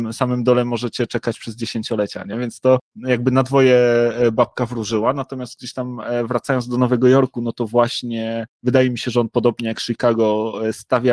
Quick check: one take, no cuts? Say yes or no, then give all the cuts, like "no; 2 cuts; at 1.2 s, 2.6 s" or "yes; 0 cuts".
yes; 0 cuts